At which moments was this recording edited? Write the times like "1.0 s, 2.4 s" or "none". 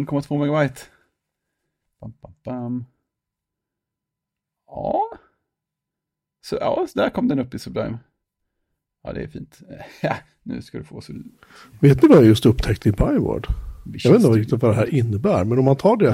none